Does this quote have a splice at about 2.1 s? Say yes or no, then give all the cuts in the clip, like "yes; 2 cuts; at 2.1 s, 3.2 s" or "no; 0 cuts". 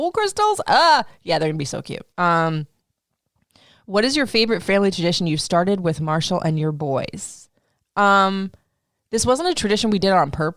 yes; 1 cut; at 2.1 s